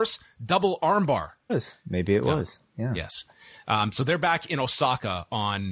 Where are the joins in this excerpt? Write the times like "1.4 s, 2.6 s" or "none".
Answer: 1.5 s